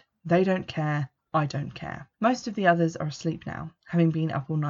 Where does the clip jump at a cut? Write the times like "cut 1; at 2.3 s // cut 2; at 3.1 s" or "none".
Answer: cut 1; at 2.1 s

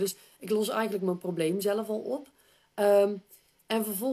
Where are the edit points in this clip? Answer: none

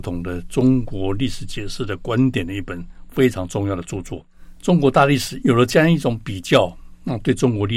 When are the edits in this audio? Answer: cut 1; at 5.4 s

